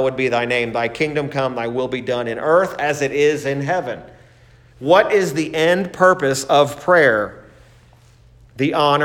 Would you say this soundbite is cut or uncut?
uncut